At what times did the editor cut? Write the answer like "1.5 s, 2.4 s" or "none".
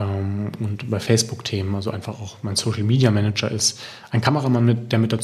none